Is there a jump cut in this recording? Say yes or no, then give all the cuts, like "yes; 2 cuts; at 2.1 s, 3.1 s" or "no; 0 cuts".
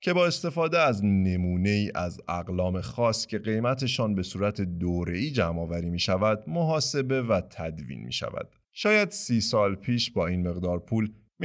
yes; 1 cut; at 8.6 s